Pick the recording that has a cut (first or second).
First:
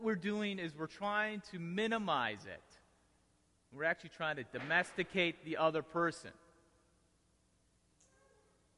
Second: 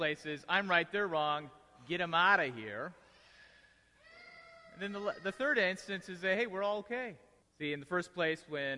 second